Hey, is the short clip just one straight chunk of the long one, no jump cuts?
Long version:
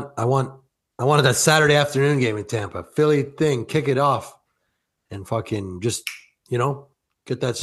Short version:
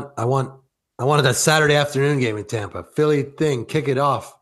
yes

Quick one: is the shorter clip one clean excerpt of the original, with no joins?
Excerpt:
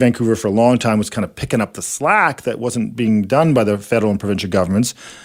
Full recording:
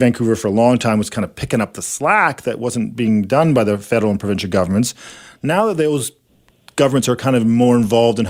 yes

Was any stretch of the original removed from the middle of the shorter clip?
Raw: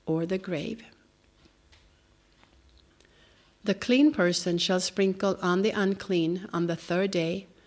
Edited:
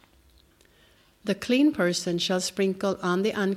no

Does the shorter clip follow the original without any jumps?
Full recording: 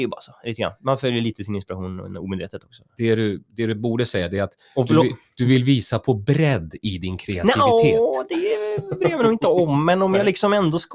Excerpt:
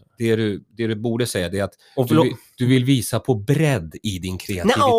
yes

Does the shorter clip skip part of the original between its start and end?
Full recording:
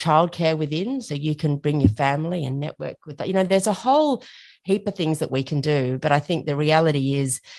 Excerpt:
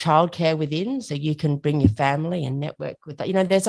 no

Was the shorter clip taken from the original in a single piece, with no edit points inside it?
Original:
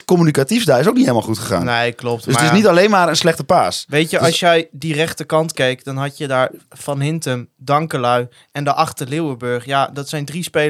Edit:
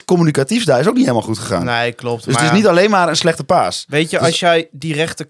yes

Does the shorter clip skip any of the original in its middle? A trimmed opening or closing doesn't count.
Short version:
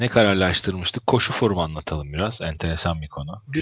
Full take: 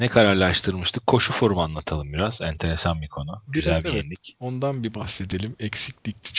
no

